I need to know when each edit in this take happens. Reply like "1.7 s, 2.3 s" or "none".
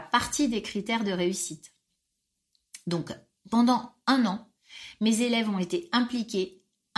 none